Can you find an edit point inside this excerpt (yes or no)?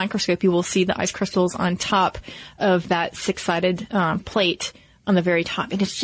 no